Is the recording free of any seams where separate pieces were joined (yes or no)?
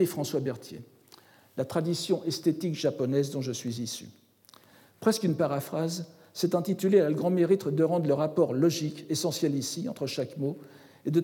yes